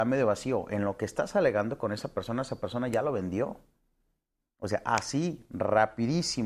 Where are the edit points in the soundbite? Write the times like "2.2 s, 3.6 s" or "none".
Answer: none